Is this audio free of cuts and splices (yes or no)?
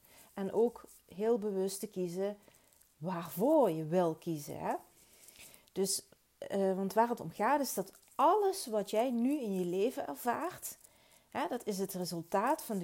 yes